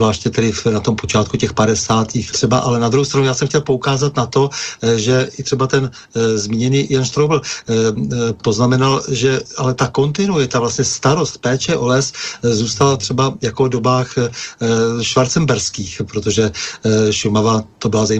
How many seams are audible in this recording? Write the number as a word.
one